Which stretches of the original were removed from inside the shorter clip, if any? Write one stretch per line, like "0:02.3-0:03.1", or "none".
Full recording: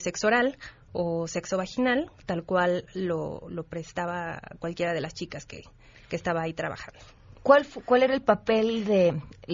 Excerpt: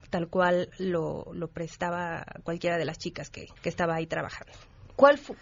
0:05.7-0:06.0